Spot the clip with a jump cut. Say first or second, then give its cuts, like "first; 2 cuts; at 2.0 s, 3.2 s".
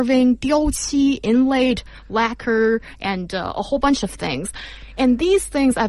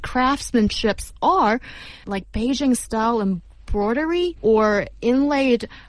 second; 2 cuts; at 2.0 s, 4.4 s